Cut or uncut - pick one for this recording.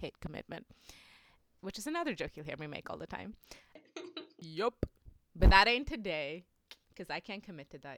cut